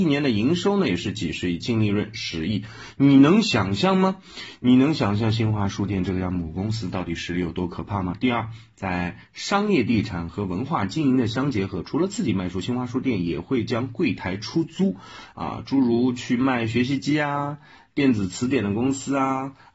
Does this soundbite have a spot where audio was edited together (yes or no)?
no